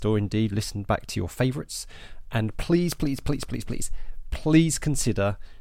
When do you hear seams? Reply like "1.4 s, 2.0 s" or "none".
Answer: none

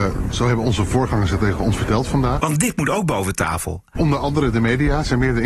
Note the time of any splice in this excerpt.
2.4 s, 4.0 s

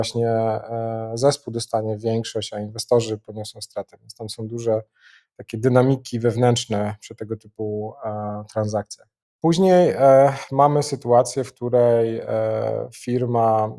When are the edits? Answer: none

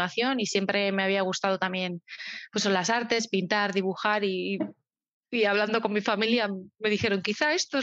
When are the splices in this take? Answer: none

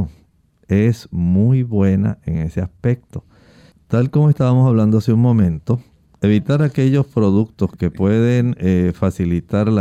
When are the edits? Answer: 3.7 s

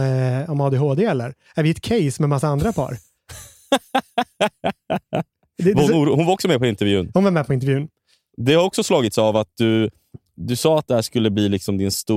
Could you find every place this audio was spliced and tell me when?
none

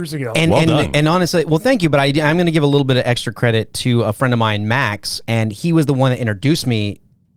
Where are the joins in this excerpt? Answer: 5.2 s

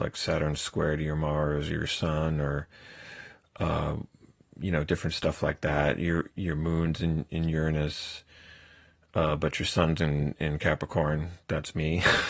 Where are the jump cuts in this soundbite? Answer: 6.3 s

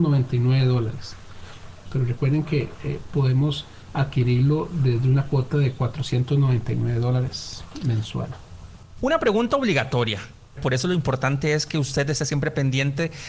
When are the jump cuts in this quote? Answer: 1.9 s, 9.0 s, 10.6 s

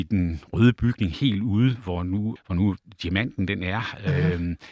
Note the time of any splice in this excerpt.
2.4 s

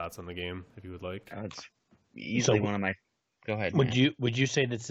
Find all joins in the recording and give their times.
none

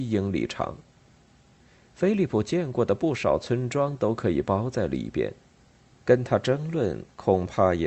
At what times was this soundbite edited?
6.0 s

